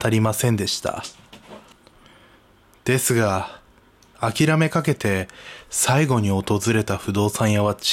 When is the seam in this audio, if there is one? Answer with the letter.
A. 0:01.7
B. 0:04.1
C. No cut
C